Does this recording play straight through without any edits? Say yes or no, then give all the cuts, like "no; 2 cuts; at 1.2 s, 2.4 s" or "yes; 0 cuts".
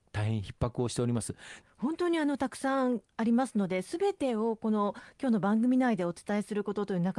no; 1 cut; at 1.6 s